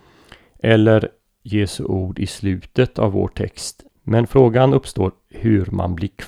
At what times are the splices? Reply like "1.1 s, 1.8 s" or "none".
3.9 s